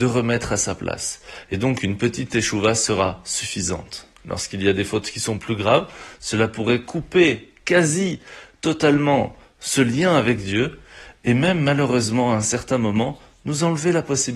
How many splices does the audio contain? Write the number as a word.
zero